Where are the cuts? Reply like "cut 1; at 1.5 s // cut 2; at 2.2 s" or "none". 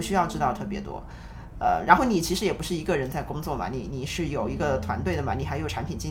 none